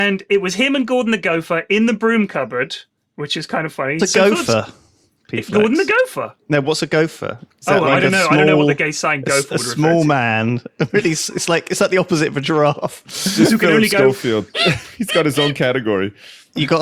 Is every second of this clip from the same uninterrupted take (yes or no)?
no